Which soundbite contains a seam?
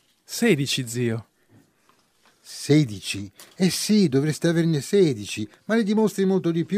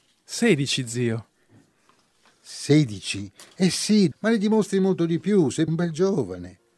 second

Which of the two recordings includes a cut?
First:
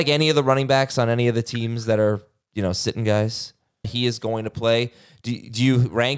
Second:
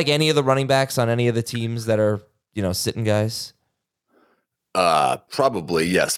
first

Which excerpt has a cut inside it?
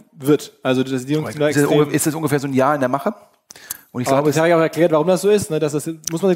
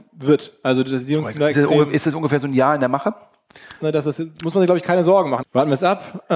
second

